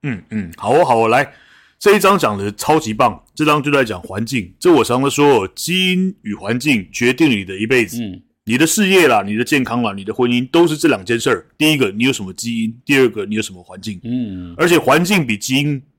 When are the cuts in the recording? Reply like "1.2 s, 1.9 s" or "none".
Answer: none

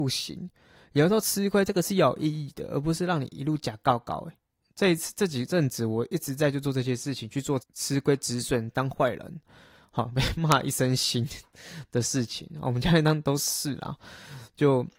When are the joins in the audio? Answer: 7.6 s

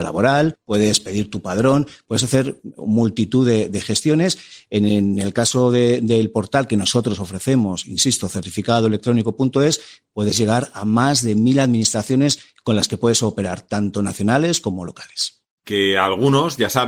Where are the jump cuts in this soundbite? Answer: 15.6 s

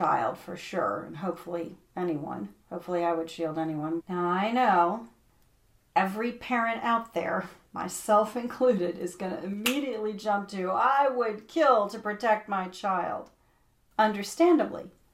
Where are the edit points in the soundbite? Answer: 2.6 s, 4.0 s

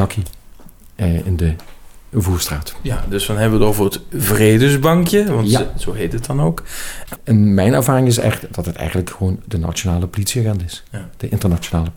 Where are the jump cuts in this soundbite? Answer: 7.2 s

